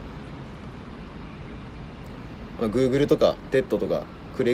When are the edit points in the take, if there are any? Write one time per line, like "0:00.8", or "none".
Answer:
0:02.6